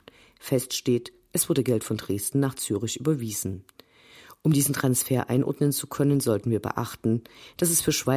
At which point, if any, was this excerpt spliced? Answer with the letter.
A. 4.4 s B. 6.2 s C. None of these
C